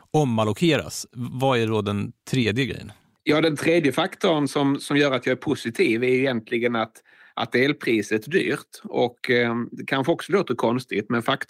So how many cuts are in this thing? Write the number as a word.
zero